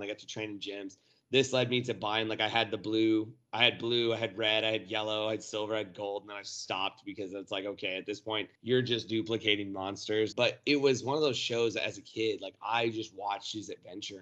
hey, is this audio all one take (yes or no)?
no